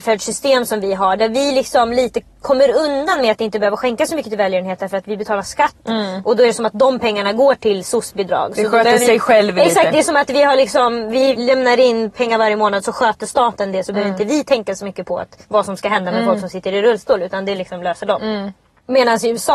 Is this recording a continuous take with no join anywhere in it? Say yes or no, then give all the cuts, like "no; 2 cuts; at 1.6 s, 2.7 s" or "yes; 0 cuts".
yes; 0 cuts